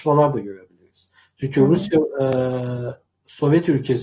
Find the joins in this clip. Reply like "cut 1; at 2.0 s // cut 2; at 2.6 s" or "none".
cut 1; at 3.1 s